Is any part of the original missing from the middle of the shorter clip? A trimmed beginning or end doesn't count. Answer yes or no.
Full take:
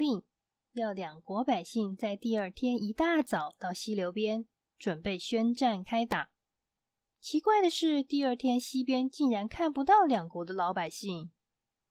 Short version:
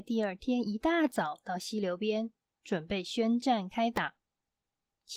no